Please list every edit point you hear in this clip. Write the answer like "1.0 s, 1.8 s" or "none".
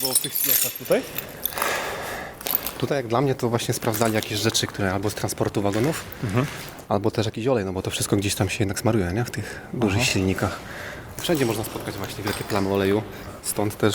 none